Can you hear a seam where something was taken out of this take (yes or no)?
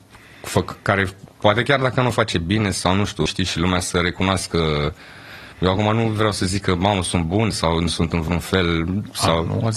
yes